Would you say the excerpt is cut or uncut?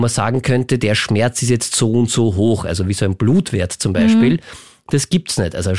uncut